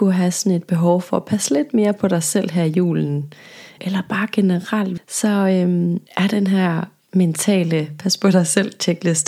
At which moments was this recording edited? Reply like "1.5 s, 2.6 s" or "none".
3.8 s, 5.0 s, 6.1 s